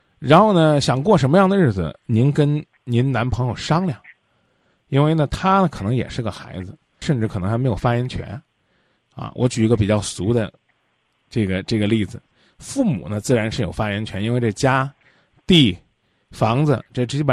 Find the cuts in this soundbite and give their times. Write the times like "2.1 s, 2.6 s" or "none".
7.0 s